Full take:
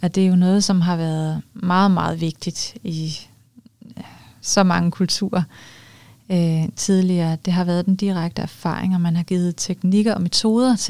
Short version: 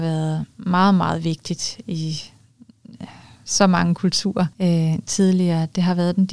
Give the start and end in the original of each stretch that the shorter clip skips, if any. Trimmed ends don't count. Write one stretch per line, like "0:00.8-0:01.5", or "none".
0:05.5-0:06.2